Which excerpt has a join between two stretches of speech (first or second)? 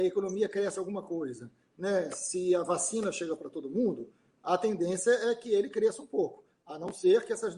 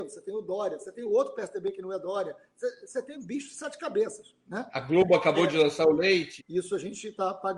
second